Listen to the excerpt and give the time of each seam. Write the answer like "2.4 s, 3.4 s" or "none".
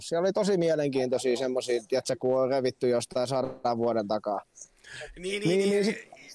none

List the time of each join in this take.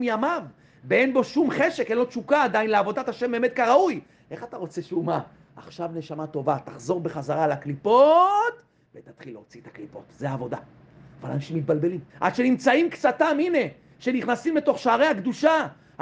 5.5 s, 12.1 s

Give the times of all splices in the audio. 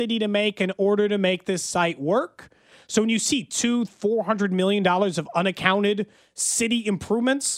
3.9 s

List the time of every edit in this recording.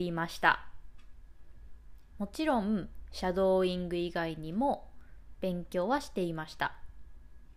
2.1 s

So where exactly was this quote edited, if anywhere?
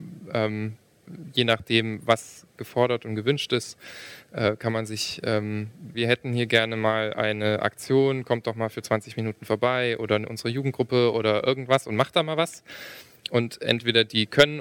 5.9 s

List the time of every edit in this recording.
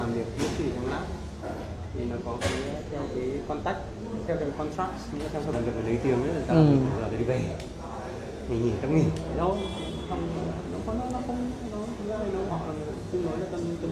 5.5 s, 12.5 s

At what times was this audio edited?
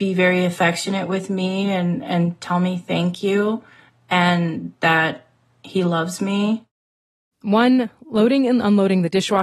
7.3 s

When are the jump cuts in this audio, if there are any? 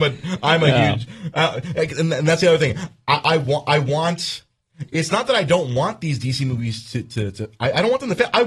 none

